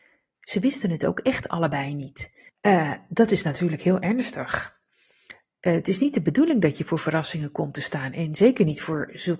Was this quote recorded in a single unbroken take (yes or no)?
no